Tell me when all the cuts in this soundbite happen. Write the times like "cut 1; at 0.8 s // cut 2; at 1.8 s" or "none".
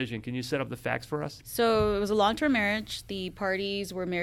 cut 1; at 1.4 s